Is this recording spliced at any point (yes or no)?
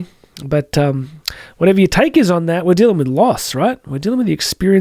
no